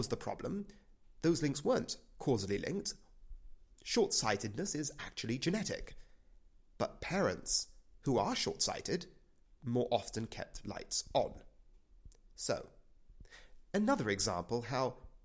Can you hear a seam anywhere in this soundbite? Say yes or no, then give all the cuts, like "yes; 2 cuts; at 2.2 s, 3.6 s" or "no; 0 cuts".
no; 0 cuts